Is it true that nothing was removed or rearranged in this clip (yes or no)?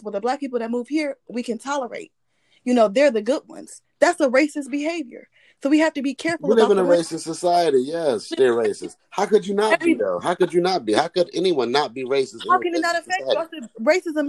yes